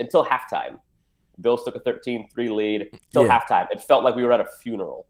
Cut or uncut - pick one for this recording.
uncut